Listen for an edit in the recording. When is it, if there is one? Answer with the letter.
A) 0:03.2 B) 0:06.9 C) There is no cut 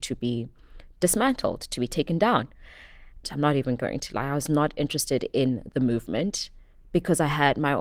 A